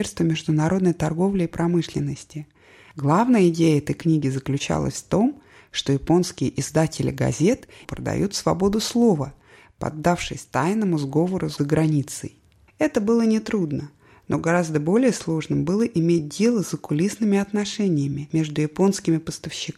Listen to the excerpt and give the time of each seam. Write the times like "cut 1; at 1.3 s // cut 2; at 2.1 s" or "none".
cut 1; at 7.8 s // cut 2; at 12.7 s